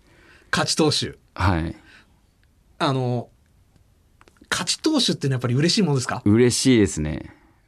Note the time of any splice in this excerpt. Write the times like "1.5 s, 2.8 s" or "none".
none